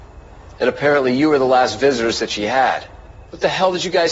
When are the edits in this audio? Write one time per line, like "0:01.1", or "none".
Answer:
none